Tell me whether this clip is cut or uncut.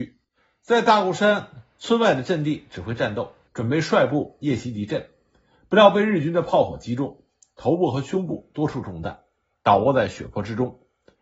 cut